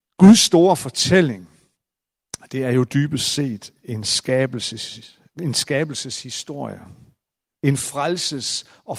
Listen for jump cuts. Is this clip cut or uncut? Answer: uncut